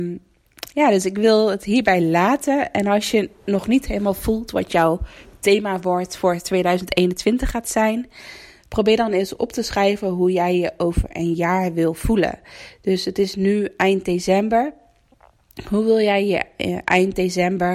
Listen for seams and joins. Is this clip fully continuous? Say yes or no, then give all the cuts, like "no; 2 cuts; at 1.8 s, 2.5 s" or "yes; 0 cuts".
yes; 0 cuts